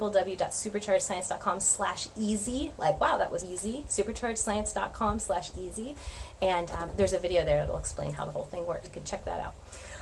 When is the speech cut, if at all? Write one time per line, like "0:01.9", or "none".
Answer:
0:03.4
0:08.8